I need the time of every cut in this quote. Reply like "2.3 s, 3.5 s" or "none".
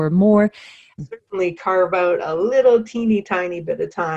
1.0 s